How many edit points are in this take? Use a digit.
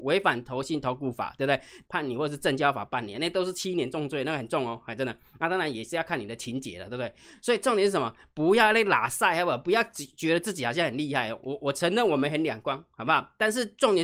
1